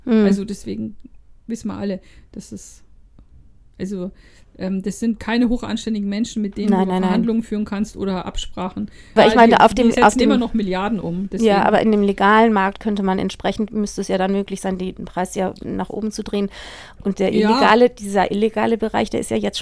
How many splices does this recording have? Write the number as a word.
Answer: one